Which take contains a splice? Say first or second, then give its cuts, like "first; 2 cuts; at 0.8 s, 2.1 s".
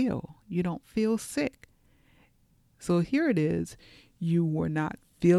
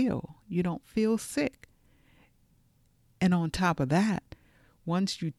first; 1 cut; at 2.7 s